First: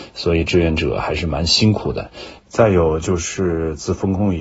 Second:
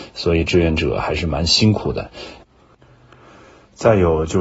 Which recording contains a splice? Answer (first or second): first